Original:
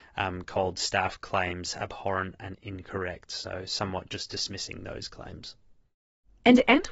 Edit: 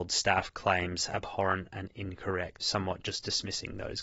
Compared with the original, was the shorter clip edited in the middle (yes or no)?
yes